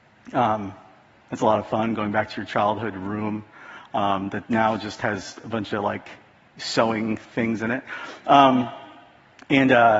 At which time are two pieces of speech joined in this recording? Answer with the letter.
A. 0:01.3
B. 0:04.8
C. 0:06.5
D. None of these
D